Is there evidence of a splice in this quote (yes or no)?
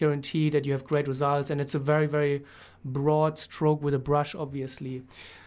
no